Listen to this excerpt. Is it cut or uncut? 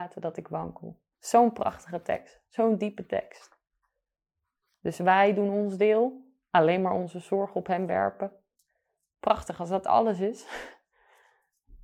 cut